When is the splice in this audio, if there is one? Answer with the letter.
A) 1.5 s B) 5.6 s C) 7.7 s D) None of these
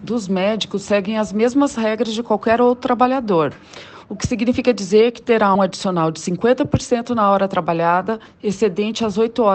B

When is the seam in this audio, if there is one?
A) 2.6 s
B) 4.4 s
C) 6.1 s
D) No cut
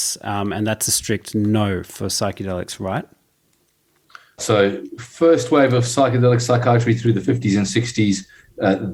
B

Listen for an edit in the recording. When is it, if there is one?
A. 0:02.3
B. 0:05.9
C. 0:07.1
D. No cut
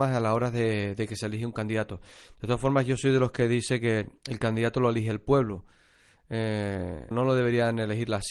C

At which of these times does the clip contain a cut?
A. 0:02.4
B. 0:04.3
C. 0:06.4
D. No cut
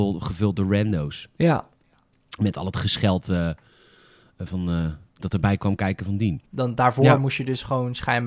C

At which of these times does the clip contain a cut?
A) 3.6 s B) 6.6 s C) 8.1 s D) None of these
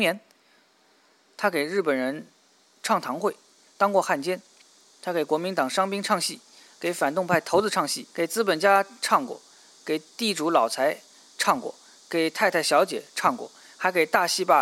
C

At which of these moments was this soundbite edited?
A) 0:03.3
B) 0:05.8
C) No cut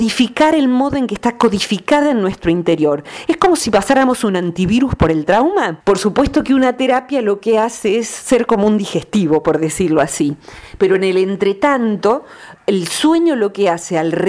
B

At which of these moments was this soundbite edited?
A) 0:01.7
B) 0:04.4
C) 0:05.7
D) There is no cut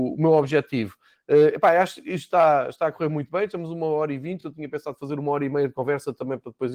D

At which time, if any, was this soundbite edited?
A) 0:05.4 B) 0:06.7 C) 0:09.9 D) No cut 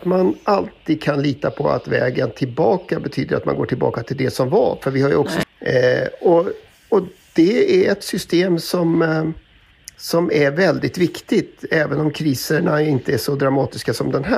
A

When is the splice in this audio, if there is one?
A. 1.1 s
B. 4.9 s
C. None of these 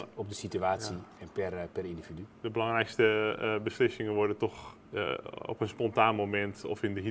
B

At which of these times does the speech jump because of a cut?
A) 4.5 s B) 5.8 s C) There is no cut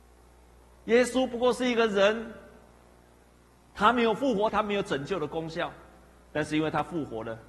A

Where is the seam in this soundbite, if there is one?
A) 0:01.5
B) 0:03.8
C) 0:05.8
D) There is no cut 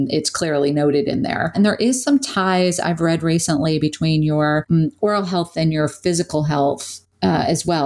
A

